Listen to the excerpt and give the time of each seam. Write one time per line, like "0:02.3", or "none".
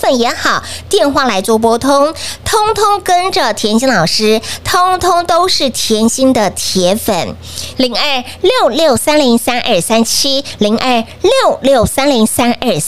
0:07.7